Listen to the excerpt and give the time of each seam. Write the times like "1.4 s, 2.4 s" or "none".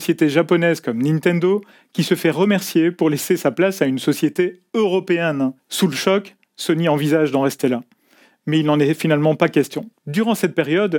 5.6 s, 10.0 s